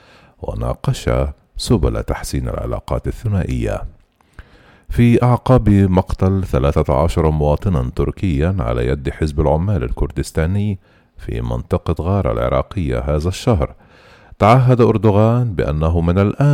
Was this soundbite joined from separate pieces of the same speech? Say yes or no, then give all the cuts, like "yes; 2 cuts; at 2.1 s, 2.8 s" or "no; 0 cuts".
no; 0 cuts